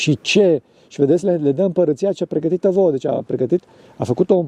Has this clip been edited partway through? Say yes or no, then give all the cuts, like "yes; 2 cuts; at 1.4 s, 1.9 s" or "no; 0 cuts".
no; 0 cuts